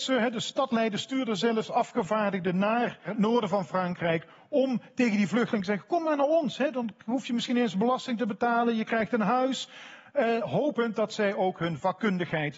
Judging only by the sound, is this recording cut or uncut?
uncut